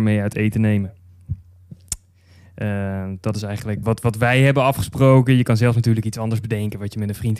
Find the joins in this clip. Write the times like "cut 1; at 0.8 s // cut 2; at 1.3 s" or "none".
cut 1; at 3.8 s